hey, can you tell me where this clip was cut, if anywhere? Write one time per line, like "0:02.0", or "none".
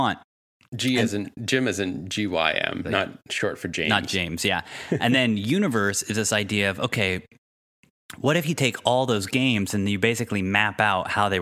0:02.8